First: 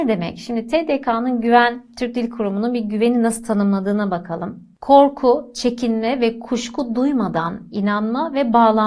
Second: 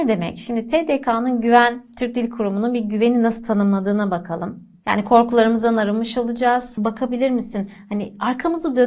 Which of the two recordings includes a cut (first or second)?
second